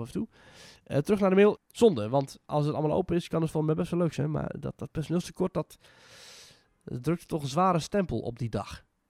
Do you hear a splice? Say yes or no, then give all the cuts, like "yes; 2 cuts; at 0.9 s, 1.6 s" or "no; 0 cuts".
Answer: yes; 1 cut; at 1.6 s